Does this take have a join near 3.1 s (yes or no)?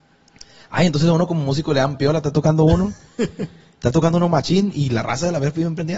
no